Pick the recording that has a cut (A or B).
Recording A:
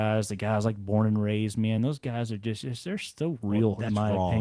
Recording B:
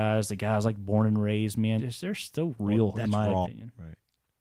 B